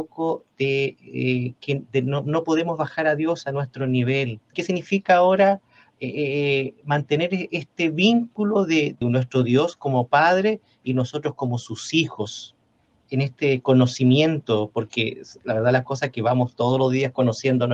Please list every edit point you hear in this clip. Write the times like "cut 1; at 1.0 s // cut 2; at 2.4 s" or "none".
cut 1; at 4.5 s // cut 2; at 9.0 s